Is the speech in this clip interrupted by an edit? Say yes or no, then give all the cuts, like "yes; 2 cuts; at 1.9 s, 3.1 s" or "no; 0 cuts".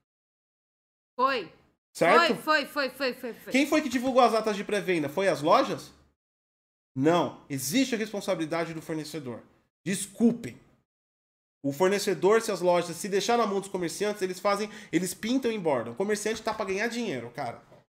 no; 0 cuts